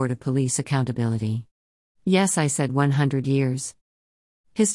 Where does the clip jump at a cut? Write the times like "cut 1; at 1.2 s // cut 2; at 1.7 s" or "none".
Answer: cut 1; at 1.9 s